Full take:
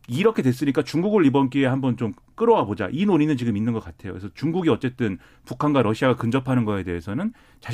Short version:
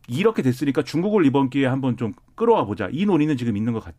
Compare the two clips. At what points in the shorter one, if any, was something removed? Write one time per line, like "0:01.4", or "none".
none